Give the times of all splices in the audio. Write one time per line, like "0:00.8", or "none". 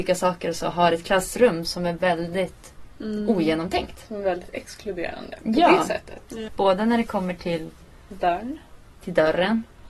0:06.5